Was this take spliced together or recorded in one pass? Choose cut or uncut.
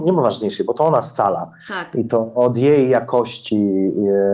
uncut